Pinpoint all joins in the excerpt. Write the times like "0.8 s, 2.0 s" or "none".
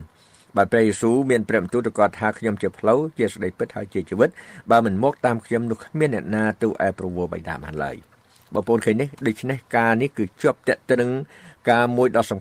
11.0 s